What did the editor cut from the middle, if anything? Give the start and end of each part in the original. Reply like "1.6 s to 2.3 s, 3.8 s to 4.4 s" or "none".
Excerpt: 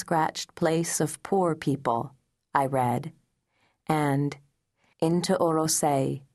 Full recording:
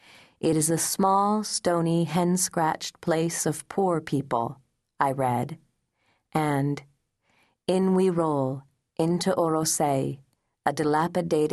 7.4 s to 8.9 s